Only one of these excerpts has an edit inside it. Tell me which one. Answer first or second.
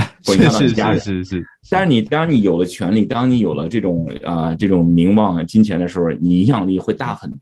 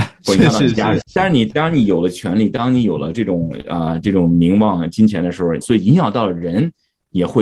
second